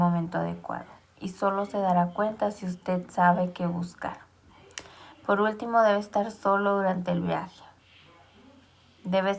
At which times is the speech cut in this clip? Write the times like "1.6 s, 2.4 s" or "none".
none